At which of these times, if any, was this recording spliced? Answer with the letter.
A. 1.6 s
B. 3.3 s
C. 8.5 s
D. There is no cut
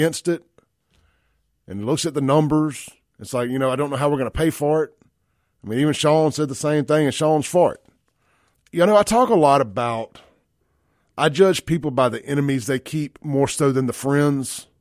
C